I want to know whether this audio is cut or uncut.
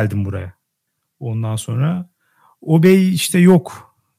uncut